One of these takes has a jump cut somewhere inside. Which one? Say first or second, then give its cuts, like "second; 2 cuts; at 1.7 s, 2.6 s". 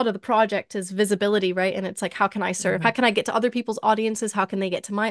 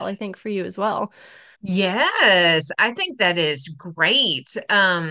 second; 1 cut; at 1.5 s